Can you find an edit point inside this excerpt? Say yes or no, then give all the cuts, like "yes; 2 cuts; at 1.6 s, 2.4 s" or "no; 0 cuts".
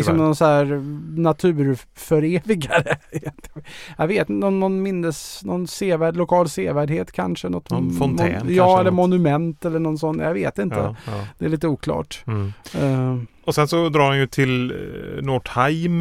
no; 0 cuts